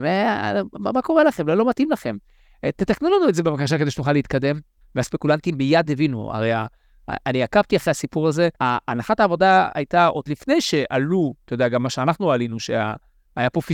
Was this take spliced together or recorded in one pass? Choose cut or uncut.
cut